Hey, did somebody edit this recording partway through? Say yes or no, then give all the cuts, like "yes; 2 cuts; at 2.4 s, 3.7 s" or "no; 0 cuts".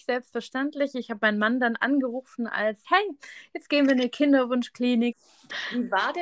yes; 2 cuts; at 2.8 s, 5.1 s